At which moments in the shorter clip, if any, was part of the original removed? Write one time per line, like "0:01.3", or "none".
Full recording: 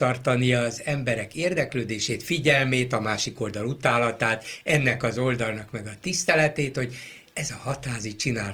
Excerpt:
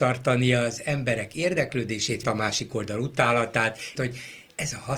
0:02.2
0:04.0